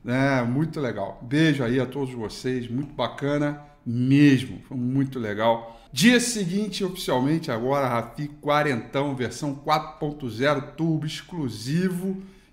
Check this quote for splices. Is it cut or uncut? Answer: cut